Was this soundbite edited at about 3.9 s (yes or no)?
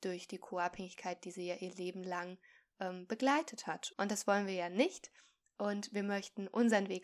yes